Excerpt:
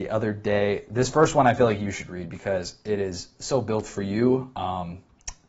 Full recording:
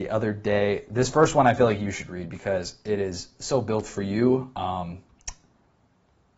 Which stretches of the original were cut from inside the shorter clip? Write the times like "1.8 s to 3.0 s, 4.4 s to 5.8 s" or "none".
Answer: none